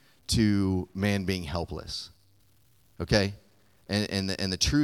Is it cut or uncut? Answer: uncut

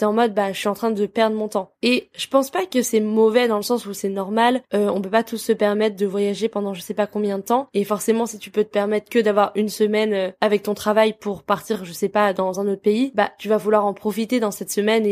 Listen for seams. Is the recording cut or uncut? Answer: uncut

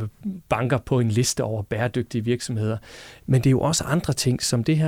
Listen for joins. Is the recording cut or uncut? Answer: cut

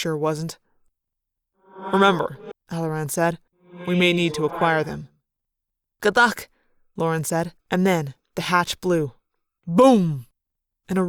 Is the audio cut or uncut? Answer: cut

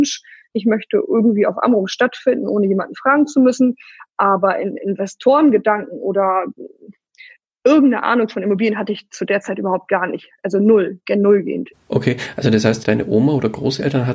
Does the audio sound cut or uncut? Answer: cut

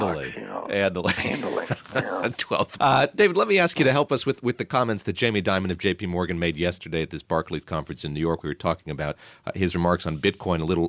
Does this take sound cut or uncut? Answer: cut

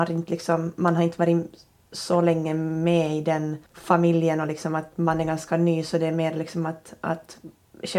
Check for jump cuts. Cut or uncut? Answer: cut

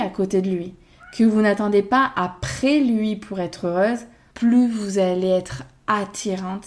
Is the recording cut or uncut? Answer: cut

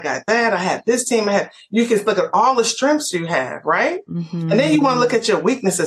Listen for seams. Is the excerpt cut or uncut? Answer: uncut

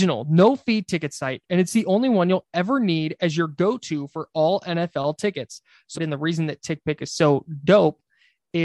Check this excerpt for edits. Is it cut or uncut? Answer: cut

